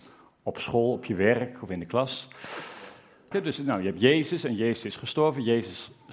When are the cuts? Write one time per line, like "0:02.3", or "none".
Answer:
0:03.3